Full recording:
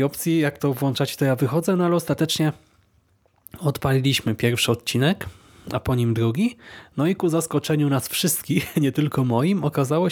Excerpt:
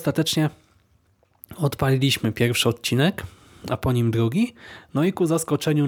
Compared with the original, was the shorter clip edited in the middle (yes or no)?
no